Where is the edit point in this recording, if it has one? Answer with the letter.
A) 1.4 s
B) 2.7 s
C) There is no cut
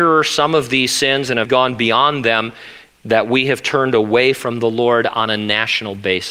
A